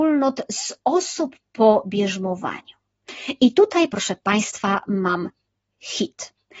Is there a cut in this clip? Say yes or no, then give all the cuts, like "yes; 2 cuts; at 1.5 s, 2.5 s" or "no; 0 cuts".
no; 0 cuts